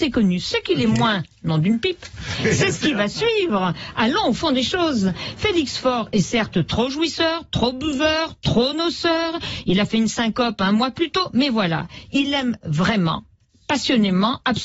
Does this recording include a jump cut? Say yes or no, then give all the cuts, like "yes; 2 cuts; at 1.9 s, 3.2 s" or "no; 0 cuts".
no; 0 cuts